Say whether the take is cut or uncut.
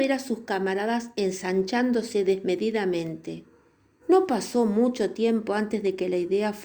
cut